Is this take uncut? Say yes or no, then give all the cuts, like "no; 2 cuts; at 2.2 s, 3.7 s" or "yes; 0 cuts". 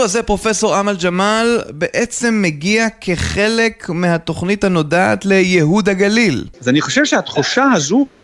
no; 1 cut; at 6.5 s